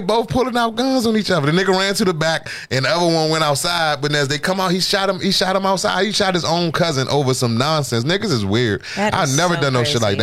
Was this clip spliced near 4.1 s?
yes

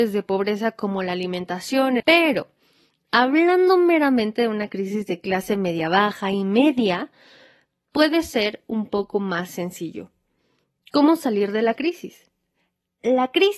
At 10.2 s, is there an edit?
no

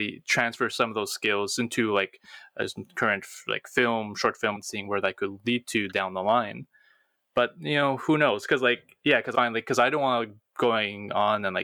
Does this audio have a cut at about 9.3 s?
yes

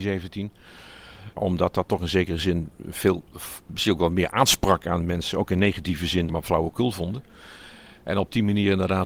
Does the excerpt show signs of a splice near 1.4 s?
yes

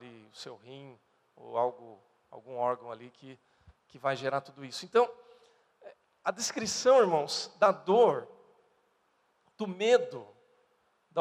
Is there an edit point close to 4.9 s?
no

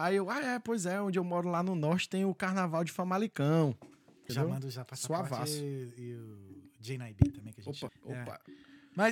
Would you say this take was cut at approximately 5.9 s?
no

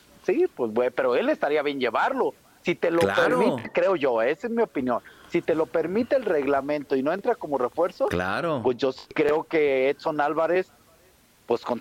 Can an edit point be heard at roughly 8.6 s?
no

